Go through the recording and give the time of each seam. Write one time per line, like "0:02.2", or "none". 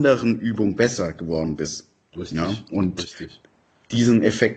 none